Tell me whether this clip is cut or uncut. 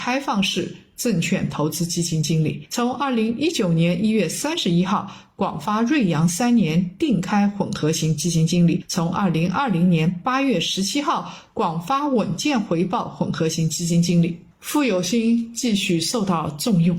uncut